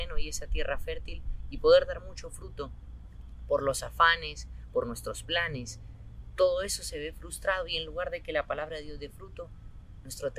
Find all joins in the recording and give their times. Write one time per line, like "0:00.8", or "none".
0:04.7